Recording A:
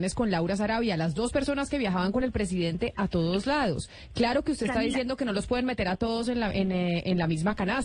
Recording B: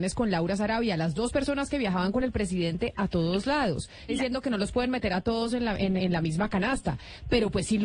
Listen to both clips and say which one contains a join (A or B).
B